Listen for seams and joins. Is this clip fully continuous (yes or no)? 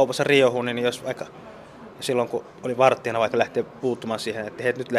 yes